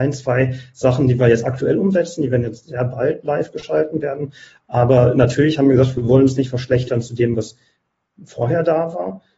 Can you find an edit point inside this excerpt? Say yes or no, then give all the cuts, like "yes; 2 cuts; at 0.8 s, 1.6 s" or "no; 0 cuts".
no; 0 cuts